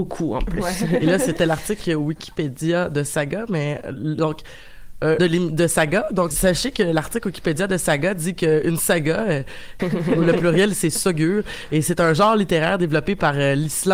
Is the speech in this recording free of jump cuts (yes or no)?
no